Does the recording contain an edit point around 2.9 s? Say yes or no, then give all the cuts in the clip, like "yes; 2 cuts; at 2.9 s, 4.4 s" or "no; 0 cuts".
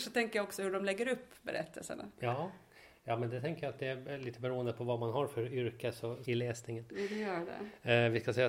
no; 1 cut; at 6.2 s